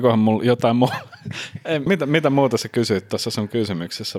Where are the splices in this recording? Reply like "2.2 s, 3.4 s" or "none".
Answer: 1.9 s